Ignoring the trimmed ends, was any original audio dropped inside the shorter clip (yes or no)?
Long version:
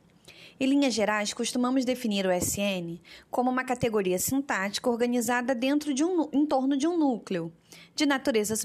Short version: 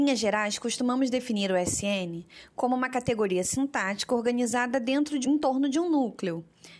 yes